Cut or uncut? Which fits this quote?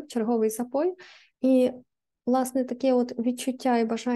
cut